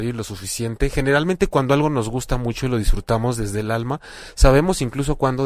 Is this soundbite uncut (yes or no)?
yes